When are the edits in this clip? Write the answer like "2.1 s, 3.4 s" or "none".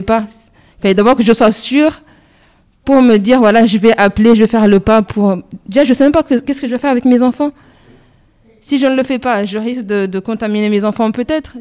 none